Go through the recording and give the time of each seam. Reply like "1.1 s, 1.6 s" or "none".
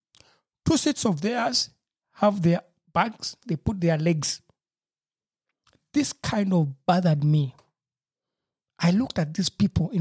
3.4 s